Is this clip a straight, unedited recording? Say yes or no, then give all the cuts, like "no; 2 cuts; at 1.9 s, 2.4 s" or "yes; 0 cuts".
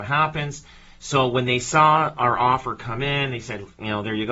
yes; 0 cuts